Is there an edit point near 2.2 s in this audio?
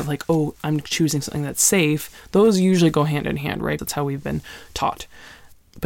no; 1 cut; at 3.8 s

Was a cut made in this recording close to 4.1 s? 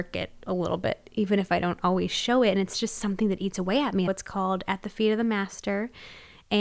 yes; 1 cut; at 4.1 s

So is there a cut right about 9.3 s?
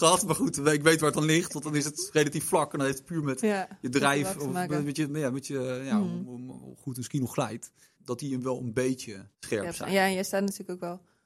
yes; 2 cuts; at 8.0 s, 9.3 s

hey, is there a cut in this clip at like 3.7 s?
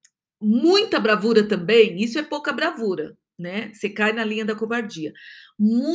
no; 0 cuts

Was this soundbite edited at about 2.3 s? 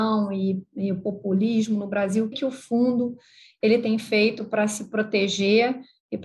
yes; 1 cut; at 2.3 s

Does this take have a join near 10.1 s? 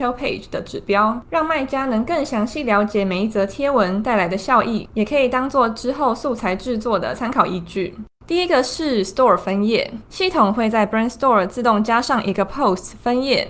no; 1 cut; at 8.2 s

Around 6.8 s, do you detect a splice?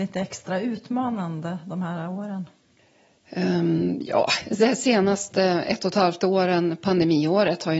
no; 0 cuts

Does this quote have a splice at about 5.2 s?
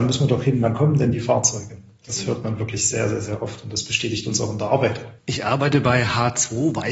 yes; 1 cut; at 5.2 s

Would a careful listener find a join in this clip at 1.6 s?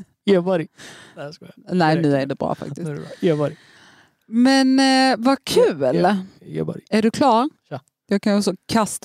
no; 2 cuts; at 6.4 s, 7.5 s

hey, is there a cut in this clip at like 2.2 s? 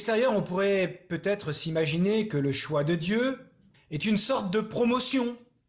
no; 1 cut; at 3.7 s

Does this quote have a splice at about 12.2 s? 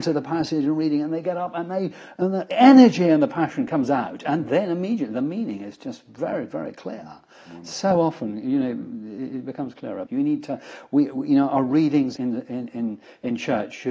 yes; 2 cuts; at 10.1 s, 12.2 s

